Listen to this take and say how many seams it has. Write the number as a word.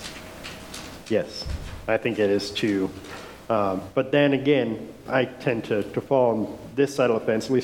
two